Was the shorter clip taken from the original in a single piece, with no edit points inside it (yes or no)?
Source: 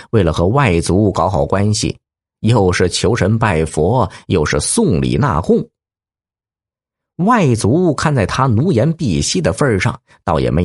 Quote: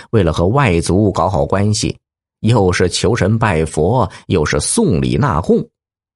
yes